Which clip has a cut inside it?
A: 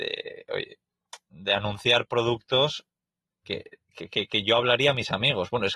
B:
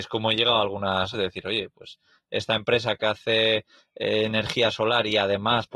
B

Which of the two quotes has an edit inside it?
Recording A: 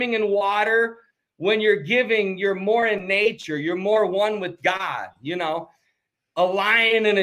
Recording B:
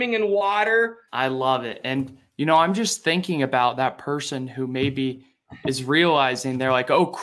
B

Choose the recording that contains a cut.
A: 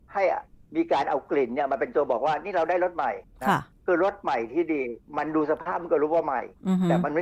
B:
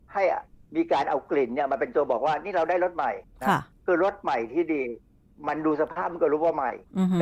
A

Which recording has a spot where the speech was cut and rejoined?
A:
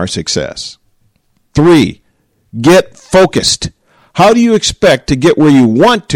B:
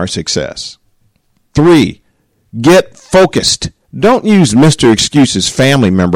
B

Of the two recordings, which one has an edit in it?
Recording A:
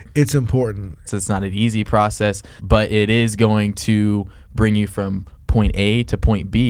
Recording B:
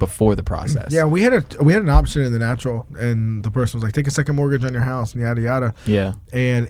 A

